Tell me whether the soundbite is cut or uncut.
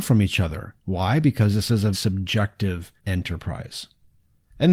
cut